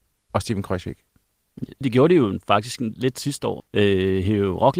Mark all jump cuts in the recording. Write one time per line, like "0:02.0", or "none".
0:01.8
0:03.6